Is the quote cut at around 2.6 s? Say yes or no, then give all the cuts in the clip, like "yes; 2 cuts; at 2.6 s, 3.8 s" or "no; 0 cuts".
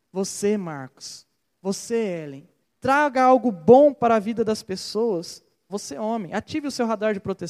yes; 2 cuts; at 2.6 s, 5.7 s